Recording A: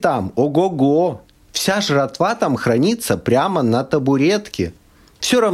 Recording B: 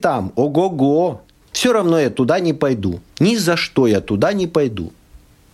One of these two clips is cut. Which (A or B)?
B